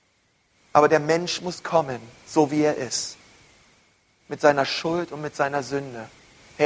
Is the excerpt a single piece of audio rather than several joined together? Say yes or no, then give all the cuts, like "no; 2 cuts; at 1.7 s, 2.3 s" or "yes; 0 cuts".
yes; 0 cuts